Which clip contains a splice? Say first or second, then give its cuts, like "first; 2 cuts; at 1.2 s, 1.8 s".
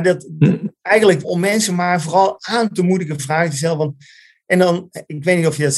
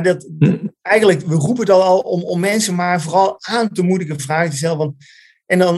first; 1 cut; at 1.2 s